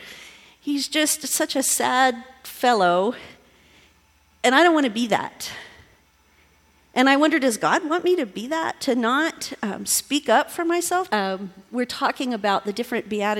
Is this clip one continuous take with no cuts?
no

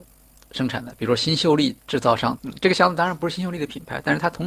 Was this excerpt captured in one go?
no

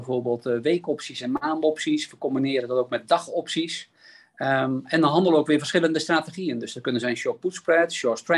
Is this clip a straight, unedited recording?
yes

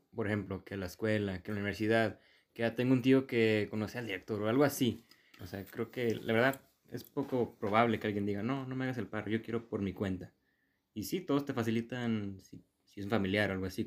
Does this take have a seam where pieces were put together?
yes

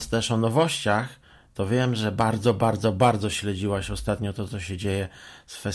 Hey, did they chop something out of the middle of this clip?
no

